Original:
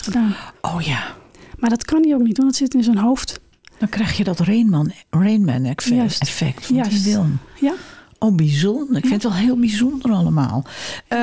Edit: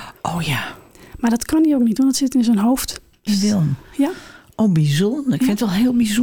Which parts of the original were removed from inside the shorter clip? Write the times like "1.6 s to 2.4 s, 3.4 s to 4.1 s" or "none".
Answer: 3.7 s to 6.9 s